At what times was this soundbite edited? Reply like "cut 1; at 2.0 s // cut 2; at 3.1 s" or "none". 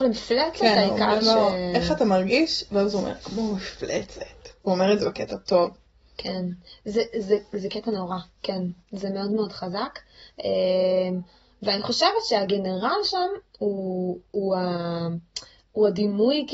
none